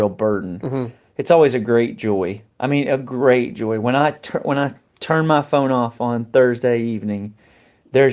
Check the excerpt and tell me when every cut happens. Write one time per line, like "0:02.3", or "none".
0:02.5